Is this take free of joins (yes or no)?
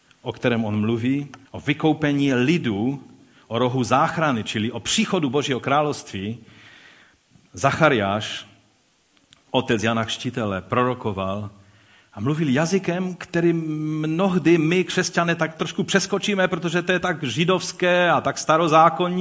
no